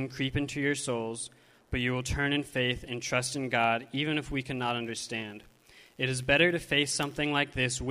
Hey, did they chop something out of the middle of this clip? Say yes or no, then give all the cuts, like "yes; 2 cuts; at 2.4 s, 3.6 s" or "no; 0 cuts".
no; 0 cuts